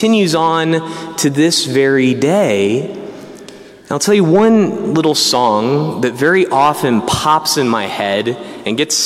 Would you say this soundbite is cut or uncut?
uncut